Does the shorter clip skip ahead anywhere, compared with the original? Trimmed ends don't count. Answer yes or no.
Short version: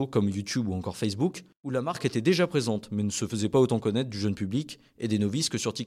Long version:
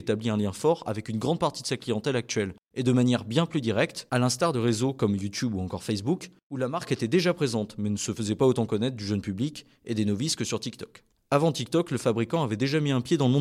no